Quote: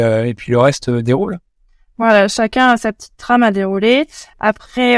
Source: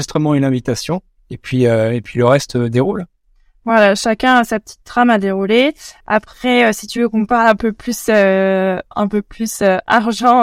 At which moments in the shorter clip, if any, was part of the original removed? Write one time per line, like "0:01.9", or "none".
none